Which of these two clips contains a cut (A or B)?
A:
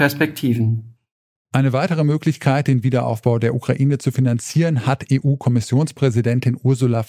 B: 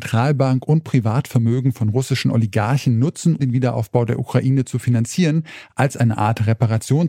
B